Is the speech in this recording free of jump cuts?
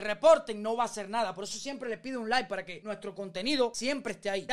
yes; 0 cuts

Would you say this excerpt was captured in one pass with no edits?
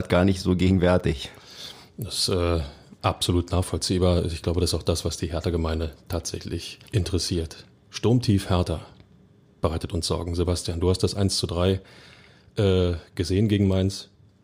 no; 1 cut; at 6.9 s

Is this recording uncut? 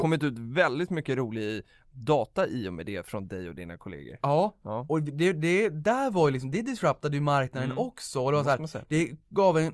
yes; 0 cuts

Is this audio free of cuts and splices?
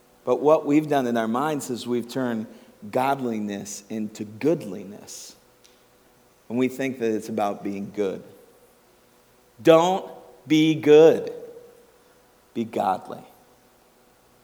yes; 0 cuts

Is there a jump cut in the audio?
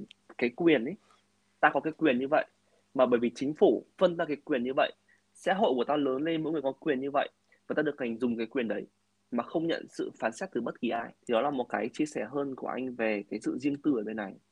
yes; 2 cuts; at 6.6 s, 11.2 s

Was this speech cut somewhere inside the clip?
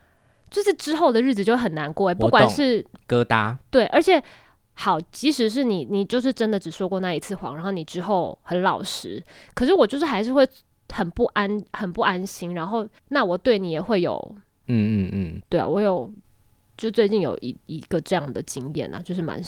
yes; 2 cuts; at 13.0 s, 14.6 s

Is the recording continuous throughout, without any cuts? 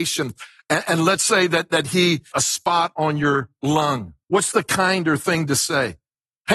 no; 2 cuts; at 2.3 s, 4.2 s

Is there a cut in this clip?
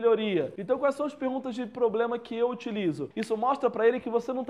yes; 1 cut; at 3.1 s

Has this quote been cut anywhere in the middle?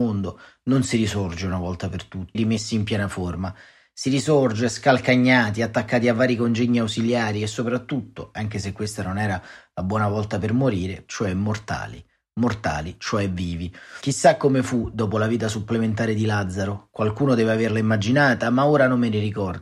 yes; 2 cuts; at 2.3 s, 11.1 s

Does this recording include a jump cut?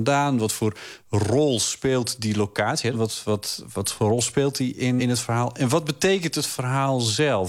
yes; 2 cuts; at 2.9 s, 5.0 s

